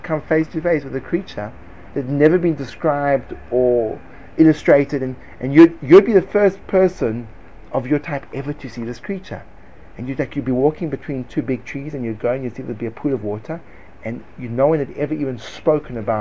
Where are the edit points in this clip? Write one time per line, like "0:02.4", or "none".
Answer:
0:11.3